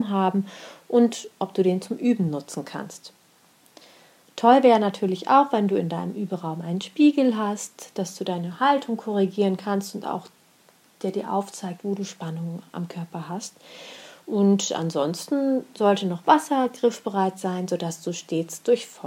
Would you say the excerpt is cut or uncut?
cut